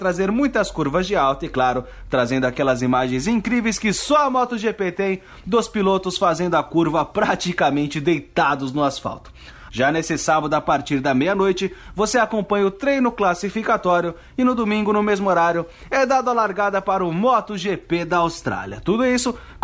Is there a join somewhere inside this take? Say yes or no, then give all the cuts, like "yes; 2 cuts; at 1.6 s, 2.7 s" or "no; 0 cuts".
yes; 1 cut; at 9.7 s